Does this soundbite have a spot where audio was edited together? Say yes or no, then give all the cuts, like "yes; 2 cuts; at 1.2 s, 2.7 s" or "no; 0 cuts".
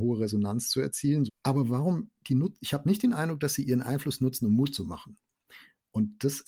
yes; 1 cut; at 1.3 s